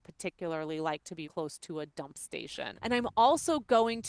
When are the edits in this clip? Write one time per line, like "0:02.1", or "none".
0:01.2
0:02.8

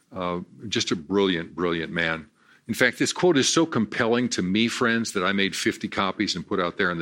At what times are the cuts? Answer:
none

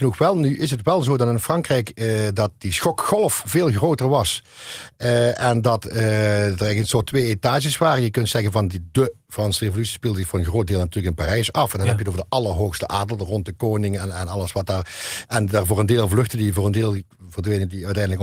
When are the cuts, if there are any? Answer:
0:08.7

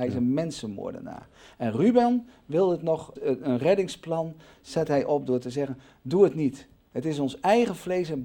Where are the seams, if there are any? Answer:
0:03.2

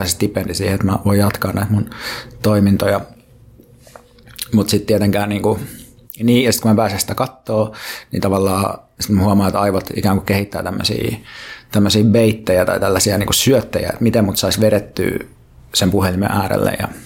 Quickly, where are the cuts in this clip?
none

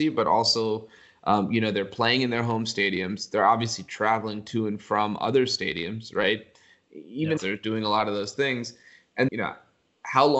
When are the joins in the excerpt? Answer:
0:07.4
0:09.3

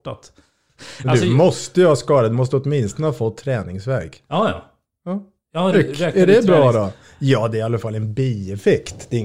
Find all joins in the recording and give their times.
0:05.7

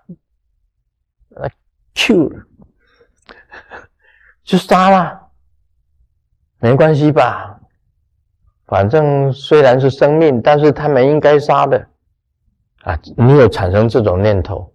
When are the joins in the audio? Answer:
none

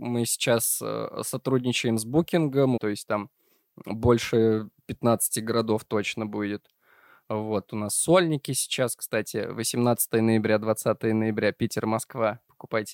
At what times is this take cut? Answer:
0:02.8

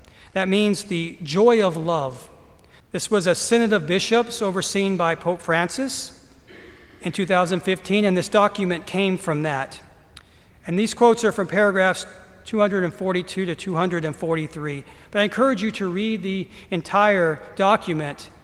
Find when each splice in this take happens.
0:02.8

